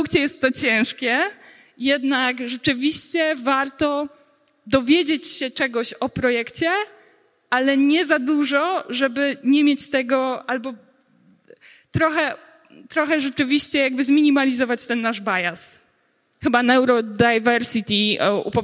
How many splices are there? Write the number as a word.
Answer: one